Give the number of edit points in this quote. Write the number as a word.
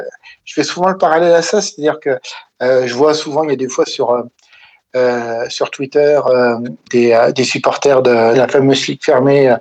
two